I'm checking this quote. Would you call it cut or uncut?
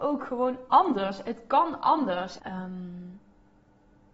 cut